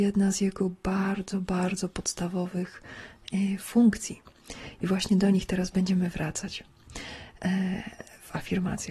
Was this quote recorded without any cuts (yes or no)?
yes